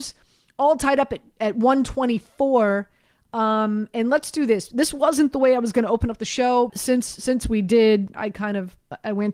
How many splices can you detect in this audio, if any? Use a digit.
2